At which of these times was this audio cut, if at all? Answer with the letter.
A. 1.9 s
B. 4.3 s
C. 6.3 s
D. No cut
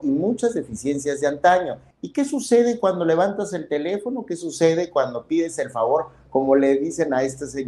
A